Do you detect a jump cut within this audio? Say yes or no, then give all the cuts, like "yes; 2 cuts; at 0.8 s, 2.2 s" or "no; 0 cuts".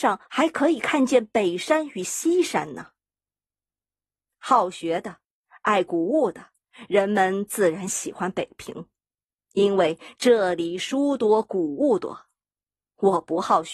no; 0 cuts